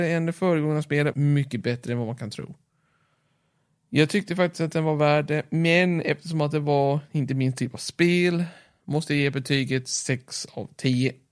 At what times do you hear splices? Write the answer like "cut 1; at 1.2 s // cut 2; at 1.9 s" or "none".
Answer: cut 1; at 1.1 s